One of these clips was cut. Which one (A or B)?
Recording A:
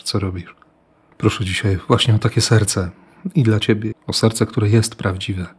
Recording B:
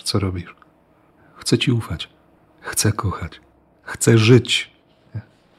A